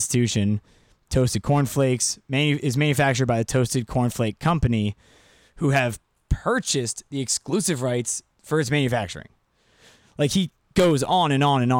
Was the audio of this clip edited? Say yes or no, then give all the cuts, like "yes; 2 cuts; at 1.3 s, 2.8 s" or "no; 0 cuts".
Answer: no; 0 cuts